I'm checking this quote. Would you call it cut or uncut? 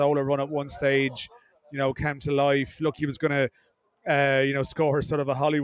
cut